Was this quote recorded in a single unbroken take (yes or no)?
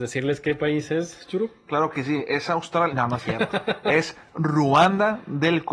yes